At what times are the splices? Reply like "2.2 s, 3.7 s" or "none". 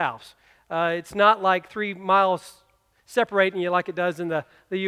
none